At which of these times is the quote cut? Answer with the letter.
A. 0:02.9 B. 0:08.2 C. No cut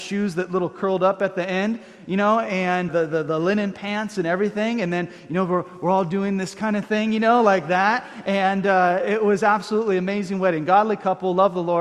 A